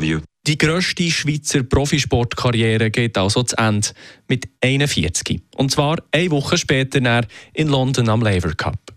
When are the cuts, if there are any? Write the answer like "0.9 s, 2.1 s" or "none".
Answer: none